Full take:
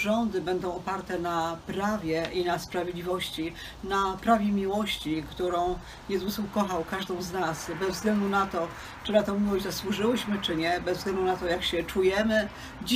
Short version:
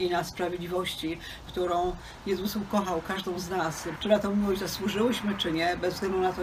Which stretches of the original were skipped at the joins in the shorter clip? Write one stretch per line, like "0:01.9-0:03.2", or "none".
0:03.8-0:05.3
0:07.8-0:09.0